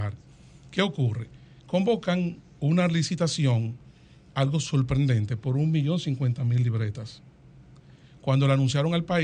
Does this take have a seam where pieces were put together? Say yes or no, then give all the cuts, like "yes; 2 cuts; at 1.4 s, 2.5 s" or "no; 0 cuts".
no; 0 cuts